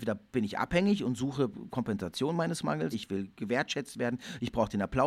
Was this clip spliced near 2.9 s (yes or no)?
yes